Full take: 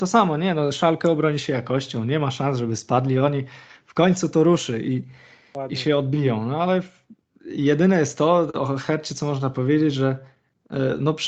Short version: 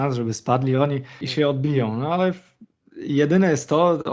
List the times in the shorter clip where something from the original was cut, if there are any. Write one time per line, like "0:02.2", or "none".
0:01.2